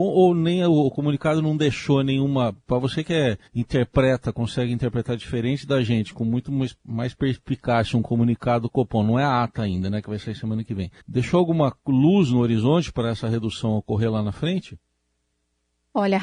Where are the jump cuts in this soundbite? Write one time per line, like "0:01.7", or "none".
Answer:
0:03.5
0:11.0